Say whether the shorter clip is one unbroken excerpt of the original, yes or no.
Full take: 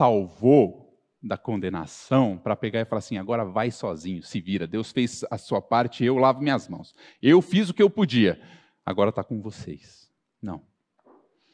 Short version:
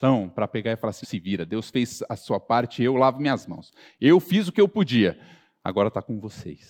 no